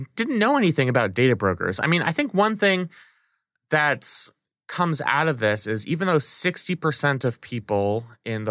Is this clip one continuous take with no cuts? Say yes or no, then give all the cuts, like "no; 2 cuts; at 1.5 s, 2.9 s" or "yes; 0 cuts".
yes; 0 cuts